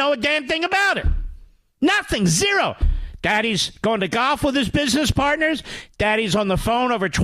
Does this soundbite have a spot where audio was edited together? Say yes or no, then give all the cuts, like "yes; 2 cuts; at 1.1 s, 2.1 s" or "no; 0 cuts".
no; 0 cuts